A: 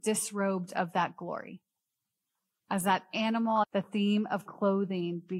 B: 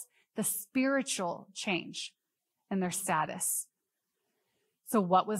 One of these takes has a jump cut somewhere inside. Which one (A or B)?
A